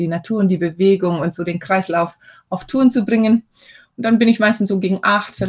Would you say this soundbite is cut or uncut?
uncut